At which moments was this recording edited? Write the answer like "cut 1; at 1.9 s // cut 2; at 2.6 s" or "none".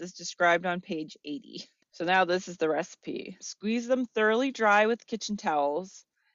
cut 1; at 1.8 s // cut 2; at 3.4 s